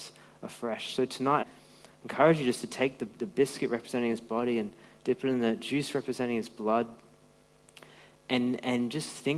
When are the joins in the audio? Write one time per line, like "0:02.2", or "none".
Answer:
0:01.4